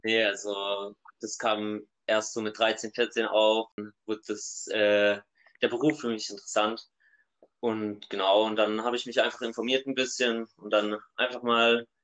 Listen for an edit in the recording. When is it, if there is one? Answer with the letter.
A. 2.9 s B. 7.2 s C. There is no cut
C